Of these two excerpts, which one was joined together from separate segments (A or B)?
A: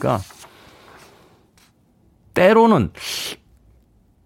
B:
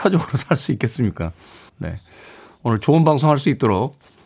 B